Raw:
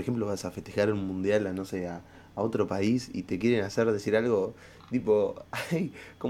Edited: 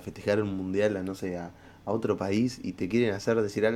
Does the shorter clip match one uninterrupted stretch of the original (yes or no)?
yes